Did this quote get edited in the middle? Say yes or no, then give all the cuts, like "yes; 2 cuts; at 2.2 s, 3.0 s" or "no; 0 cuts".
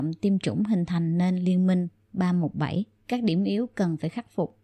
no; 0 cuts